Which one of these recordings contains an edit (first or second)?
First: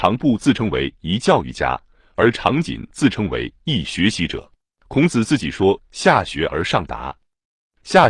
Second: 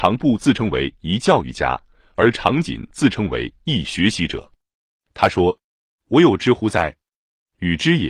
first